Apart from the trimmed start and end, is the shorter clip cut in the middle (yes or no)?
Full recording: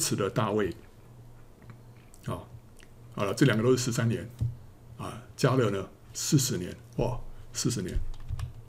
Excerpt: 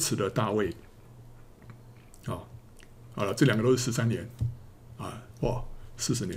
yes